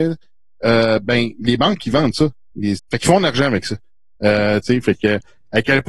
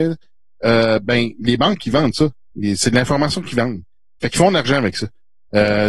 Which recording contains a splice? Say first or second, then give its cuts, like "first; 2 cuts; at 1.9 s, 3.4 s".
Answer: first; 2 cuts; at 2.8 s, 4.6 s